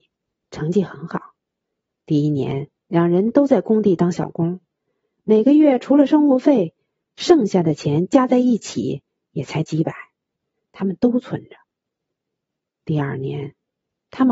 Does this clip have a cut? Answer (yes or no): yes